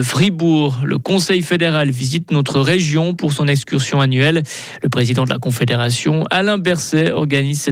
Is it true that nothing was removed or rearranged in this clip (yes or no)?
yes